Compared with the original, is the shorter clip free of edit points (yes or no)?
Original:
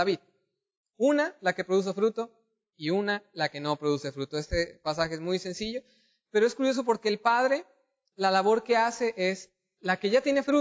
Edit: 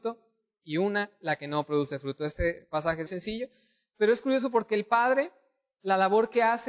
no